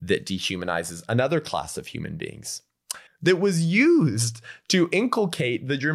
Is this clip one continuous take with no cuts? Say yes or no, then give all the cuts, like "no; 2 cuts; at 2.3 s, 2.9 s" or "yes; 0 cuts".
no; 1 cut; at 3.1 s